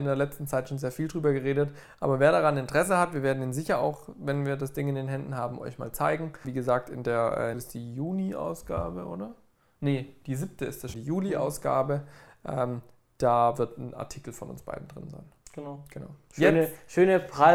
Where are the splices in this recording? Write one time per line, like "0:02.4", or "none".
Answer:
0:06.4
0:07.5
0:10.9

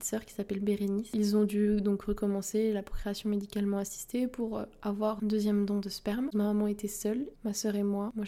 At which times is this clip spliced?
0:06.3
0:07.3

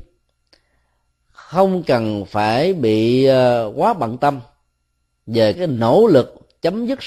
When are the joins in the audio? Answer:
0:05.5

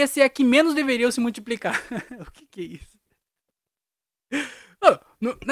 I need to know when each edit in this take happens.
none

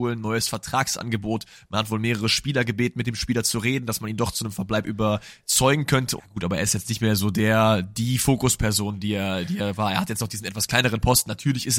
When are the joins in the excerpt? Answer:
0:06.2

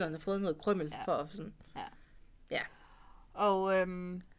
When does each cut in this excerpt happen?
none

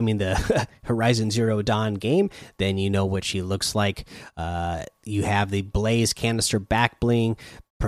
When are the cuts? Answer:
none

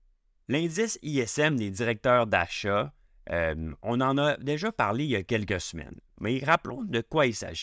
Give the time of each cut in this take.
none

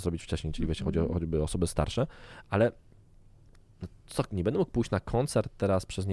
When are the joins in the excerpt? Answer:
none

